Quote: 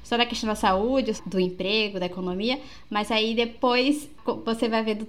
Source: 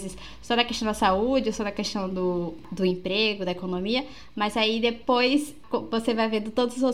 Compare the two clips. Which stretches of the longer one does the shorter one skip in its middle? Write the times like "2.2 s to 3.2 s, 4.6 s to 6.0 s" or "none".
1.5 s to 2.6 s